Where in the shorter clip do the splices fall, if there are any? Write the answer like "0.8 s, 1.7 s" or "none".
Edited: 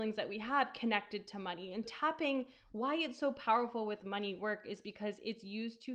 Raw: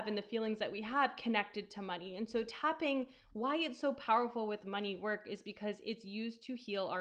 1.8 s